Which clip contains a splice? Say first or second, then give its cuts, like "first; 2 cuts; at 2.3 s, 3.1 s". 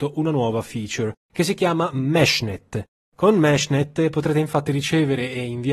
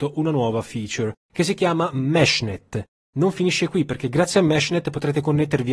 second; 1 cut; at 3.0 s